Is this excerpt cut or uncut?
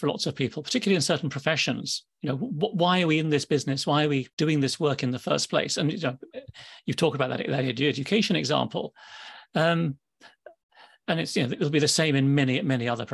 cut